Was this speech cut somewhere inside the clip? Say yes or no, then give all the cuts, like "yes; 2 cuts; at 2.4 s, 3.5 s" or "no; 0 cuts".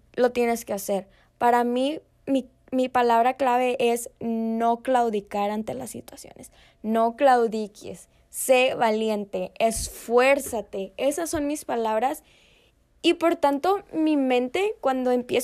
no; 0 cuts